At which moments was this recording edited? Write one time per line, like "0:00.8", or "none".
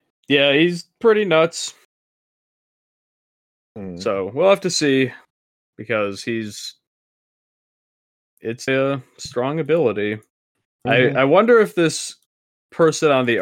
0:03.7
0:08.7